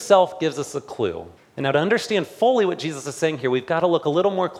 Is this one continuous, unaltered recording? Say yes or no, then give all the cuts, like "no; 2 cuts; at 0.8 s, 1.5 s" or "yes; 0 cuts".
no; 1 cut; at 1.4 s